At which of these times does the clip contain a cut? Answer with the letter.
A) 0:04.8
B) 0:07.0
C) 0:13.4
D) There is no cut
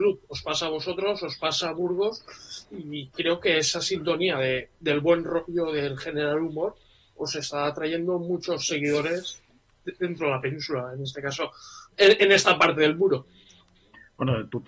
D